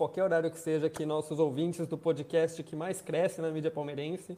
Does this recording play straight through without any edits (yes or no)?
yes